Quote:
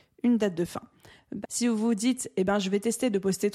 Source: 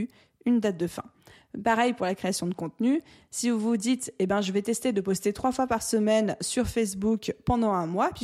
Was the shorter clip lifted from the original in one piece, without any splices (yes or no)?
no